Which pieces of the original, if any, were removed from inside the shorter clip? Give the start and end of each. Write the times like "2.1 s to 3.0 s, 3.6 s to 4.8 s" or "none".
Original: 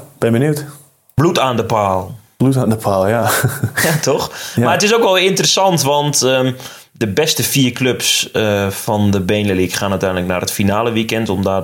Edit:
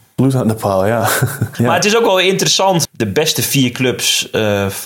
3.8 s to 4.5 s, 5.8 s to 6.9 s

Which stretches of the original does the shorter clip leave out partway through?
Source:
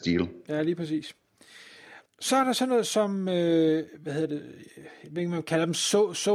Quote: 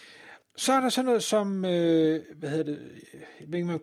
none

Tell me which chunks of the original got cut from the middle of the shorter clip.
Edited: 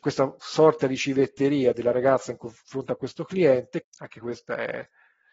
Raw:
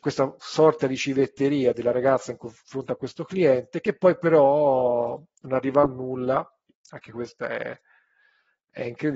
3.8 s to 6.7 s

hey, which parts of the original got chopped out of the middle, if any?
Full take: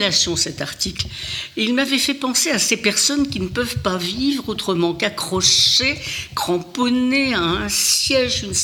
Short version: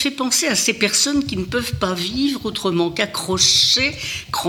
none

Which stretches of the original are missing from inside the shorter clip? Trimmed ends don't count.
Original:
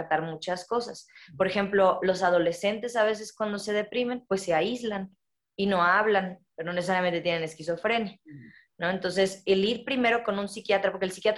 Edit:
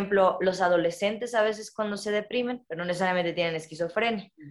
4.3 s to 6.5 s

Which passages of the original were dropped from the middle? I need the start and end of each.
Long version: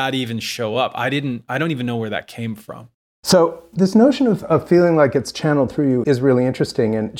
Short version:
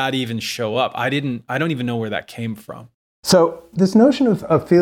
none

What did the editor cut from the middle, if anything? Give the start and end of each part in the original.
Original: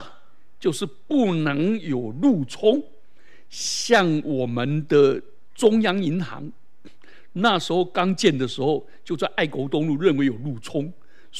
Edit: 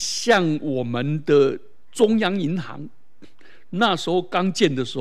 none

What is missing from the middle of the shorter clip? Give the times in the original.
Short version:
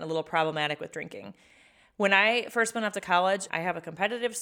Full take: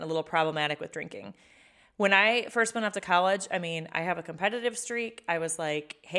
3.5 s to 3.9 s

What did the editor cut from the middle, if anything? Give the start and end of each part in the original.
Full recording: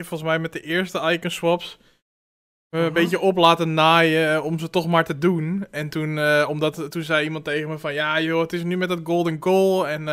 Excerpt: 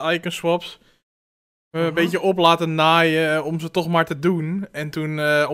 none

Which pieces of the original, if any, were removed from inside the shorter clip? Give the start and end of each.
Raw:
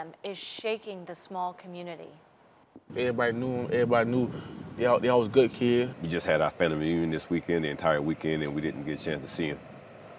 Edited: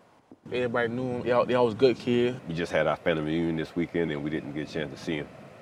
3.7 s to 4.8 s, 7.6 s to 8.4 s

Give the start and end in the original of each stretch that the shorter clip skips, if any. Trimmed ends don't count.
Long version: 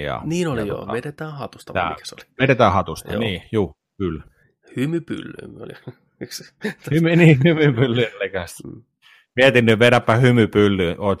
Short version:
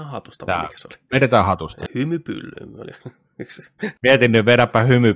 3.1 s to 4.7 s, 6.8 s to 9.3 s

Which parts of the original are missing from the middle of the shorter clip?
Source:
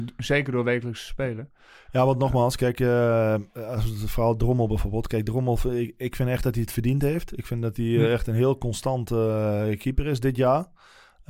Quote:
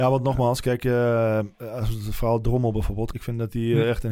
5.1 s to 7.4 s

